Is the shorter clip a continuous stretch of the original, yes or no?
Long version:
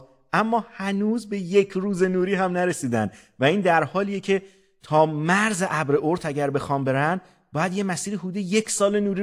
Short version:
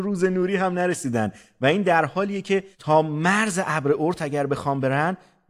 no